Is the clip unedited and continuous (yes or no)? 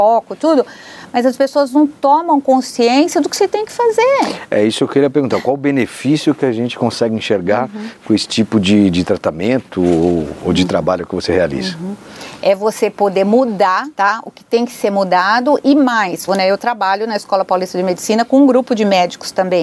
no